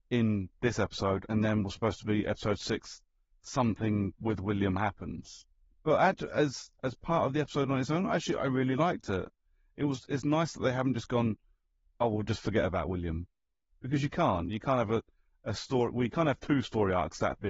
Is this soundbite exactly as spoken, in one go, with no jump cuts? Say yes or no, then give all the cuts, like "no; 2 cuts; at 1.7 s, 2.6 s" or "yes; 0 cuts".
yes; 0 cuts